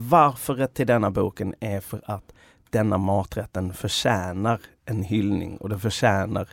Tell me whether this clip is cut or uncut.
uncut